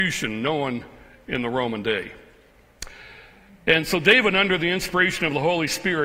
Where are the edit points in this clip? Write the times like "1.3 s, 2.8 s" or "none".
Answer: none